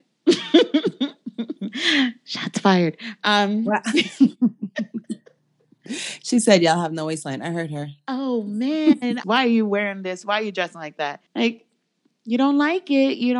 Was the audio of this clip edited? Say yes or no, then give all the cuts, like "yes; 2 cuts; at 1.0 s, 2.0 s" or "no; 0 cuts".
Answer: yes; 2 cuts; at 9.2 s, 11.3 s